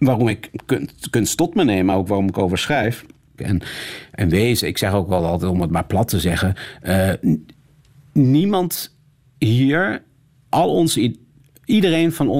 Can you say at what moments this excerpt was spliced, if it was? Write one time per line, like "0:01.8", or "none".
0:03.4
0:10.5